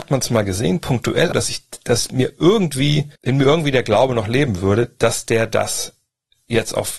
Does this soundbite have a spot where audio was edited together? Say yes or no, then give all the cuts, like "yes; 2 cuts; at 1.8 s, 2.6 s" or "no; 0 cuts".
yes; 2 cuts; at 1.3 s, 3.2 s